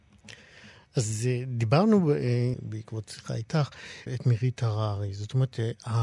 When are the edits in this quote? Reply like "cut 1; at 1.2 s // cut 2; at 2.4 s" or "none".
cut 1; at 2.5 s // cut 2; at 4.1 s